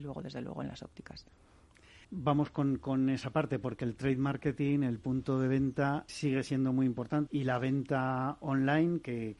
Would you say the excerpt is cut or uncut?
cut